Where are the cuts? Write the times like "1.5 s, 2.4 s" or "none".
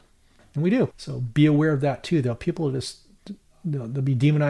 0.9 s

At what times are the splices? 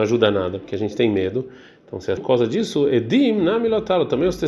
2.2 s

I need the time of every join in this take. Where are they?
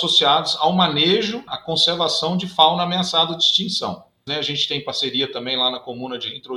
1.5 s, 4.3 s

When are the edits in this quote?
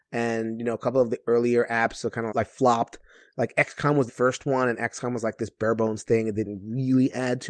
2.3 s, 4.1 s

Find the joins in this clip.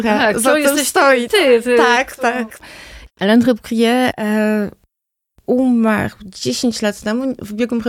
3.1 s

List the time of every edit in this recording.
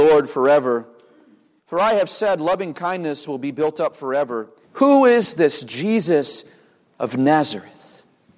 1.6 s, 4.6 s

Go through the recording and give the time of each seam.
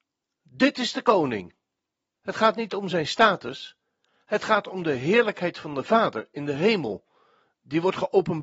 2.2 s

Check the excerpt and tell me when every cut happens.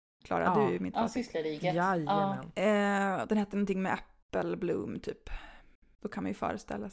none

